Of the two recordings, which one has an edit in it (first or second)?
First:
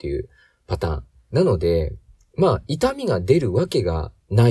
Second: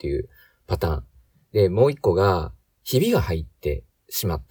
first